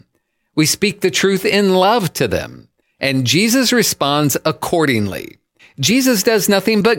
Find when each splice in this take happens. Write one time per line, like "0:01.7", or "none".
0:02.8
0:05.6